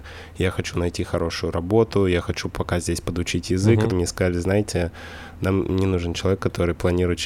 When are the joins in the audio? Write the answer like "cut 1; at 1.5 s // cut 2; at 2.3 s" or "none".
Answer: cut 1; at 3.9 s

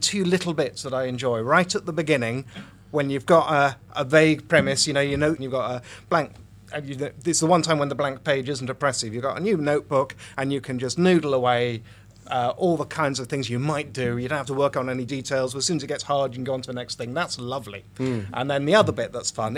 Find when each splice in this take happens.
cut 1; at 5.4 s

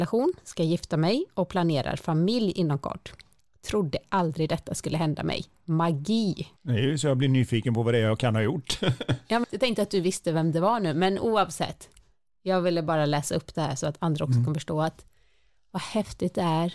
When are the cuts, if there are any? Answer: cut 1; at 6.6 s // cut 2; at 9.4 s

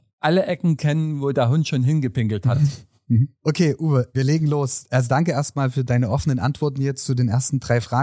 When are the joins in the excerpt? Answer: none

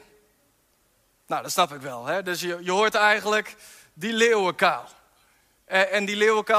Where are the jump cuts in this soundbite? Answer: none

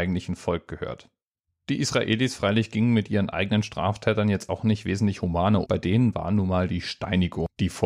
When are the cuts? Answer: cut 1; at 1.5 s // cut 2; at 5.6 s

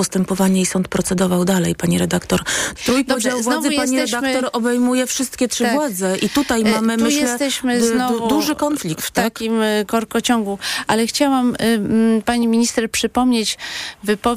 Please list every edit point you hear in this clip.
cut 1; at 2.8 s

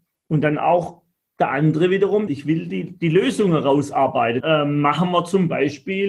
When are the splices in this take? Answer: cut 1; at 2.3 s // cut 2; at 4.4 s

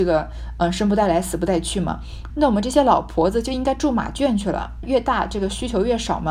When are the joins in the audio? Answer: cut 1; at 2.3 s // cut 2; at 4.8 s

